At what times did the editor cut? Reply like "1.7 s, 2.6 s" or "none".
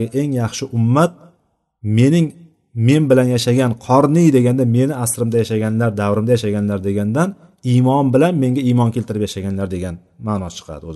none